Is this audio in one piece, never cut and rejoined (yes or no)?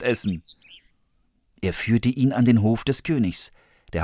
yes